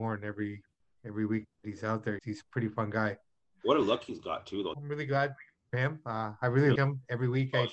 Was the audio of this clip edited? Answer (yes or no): yes